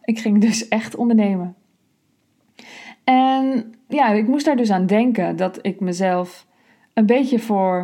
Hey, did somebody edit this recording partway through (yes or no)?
yes